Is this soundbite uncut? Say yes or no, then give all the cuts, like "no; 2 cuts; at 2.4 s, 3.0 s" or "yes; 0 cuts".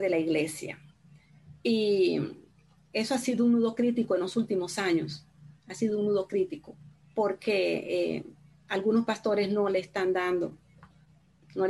no; 1 cut; at 7.0 s